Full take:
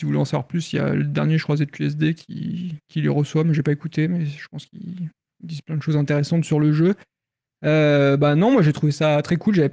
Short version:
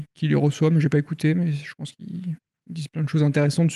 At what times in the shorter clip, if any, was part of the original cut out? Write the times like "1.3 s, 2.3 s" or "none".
none